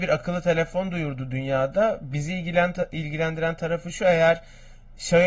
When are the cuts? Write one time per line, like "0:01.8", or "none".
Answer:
none